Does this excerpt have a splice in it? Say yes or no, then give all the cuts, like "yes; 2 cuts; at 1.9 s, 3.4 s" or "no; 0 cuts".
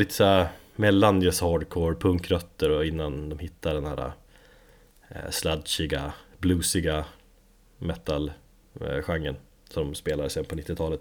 no; 0 cuts